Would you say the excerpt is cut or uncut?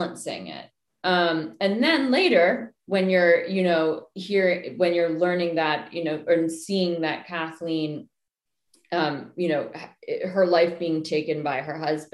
uncut